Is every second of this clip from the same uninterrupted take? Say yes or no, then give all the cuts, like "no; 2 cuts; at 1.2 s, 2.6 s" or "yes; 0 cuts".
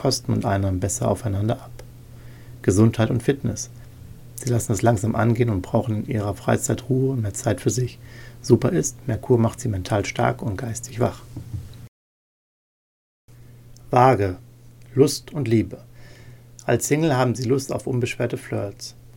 no; 1 cut; at 4.3 s